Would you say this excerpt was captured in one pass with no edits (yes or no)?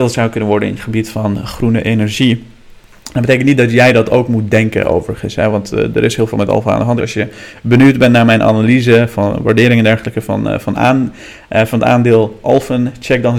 no